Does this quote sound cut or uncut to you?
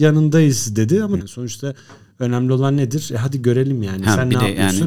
cut